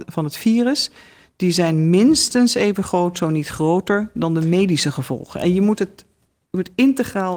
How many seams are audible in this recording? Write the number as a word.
zero